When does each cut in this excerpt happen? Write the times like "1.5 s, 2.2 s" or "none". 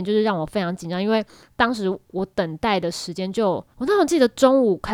3.7 s